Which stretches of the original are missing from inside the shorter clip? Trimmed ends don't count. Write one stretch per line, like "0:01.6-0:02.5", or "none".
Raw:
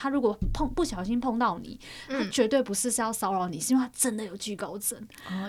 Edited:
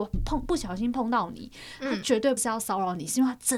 0:02.6-0:02.9